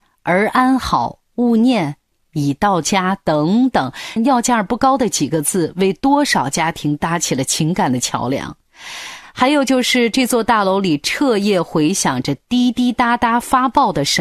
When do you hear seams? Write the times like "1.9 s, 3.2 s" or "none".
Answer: 4.2 s